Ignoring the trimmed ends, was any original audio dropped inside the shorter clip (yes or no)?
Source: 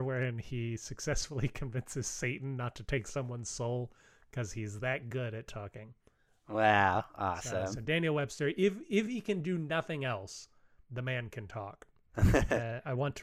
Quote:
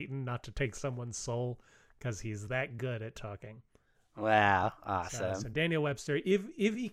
no